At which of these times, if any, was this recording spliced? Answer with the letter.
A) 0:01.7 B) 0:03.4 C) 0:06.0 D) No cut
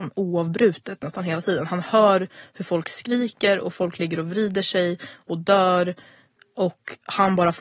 D